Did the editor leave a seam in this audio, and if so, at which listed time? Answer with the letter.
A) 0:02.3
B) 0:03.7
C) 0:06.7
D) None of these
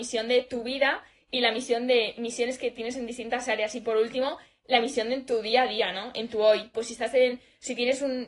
C